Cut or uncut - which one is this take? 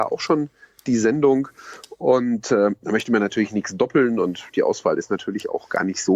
uncut